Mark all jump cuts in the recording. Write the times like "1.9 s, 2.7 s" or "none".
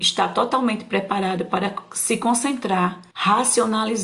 3.1 s